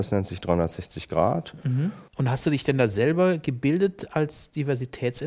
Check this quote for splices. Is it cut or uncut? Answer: cut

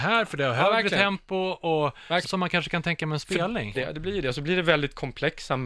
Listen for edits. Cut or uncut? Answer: cut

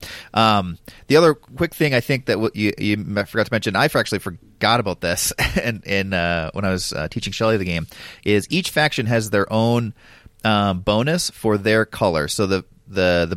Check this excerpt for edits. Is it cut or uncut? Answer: uncut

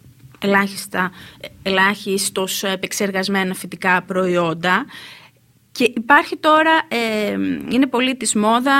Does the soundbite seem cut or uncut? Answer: uncut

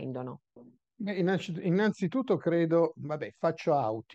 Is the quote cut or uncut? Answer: uncut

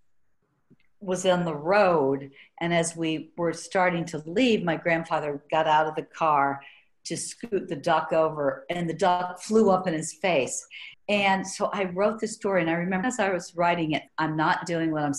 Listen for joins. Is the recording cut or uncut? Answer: cut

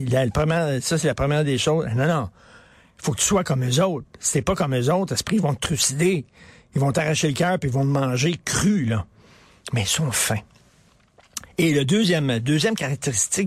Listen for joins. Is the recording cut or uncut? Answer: uncut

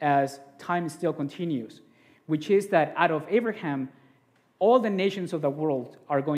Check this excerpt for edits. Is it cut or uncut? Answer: uncut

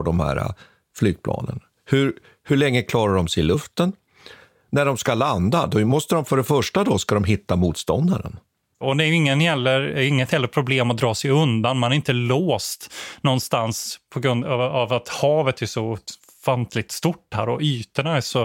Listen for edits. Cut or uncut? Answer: cut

